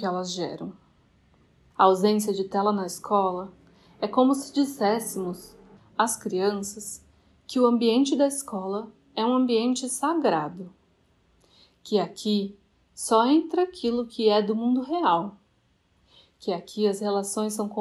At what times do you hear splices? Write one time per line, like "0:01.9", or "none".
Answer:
0:05.8